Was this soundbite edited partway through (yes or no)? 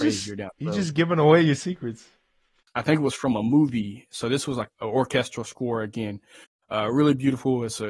yes